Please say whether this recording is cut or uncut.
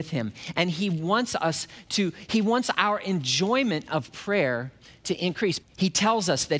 cut